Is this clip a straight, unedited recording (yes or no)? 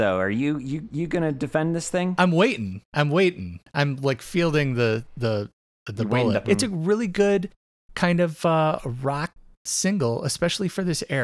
no